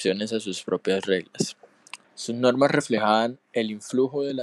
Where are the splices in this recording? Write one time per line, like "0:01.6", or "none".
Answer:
0:02.0